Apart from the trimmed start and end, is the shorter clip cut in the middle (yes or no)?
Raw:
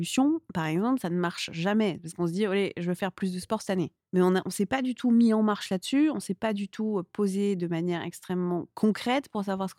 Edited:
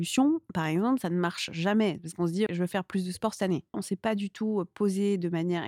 yes